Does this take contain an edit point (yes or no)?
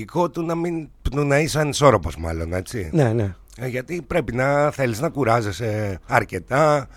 no